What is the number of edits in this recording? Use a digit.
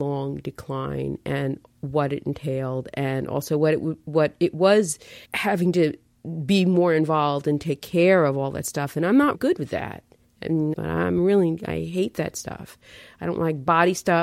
3